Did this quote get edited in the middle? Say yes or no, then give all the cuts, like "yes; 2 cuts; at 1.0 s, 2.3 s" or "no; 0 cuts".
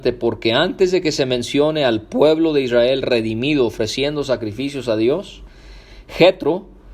no; 0 cuts